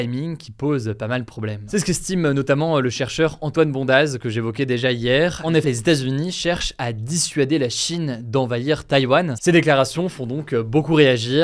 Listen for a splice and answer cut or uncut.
cut